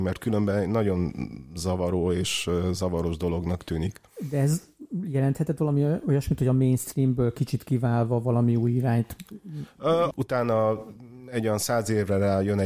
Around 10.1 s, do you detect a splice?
yes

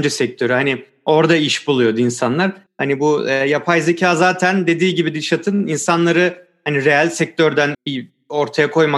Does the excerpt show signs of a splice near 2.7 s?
yes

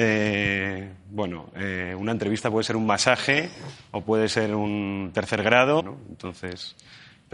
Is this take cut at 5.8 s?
yes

